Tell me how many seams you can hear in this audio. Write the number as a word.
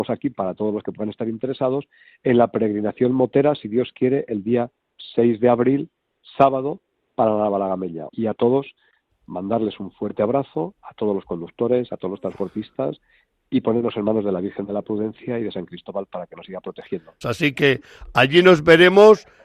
two